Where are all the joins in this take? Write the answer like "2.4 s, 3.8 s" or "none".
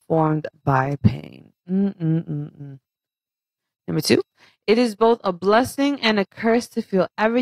none